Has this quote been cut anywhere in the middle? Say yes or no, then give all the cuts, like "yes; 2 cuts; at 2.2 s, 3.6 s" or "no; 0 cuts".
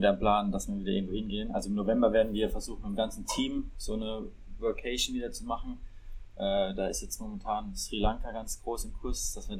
no; 0 cuts